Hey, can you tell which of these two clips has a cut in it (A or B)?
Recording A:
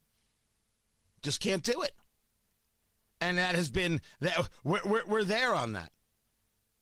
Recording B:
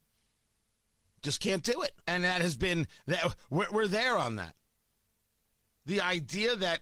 B